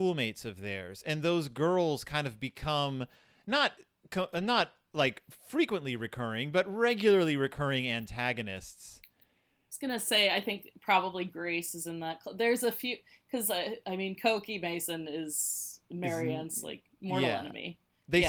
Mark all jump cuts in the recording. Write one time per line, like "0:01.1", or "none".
none